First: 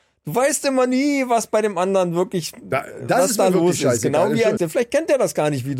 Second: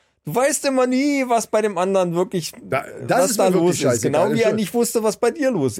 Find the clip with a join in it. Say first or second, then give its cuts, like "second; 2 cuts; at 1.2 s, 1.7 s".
first; 1 cut; at 4.6 s